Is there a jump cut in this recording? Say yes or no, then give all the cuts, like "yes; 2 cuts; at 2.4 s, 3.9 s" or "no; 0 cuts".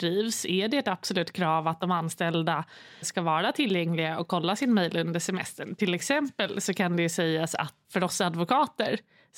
yes; 2 cuts; at 3.0 s, 7.8 s